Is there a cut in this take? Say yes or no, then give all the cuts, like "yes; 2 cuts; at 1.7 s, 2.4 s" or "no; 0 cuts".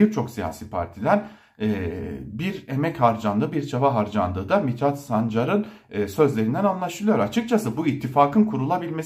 no; 0 cuts